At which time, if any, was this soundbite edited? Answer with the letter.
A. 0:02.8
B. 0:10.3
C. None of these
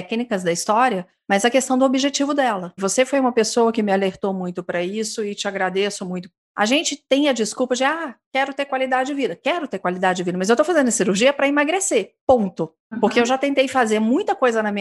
A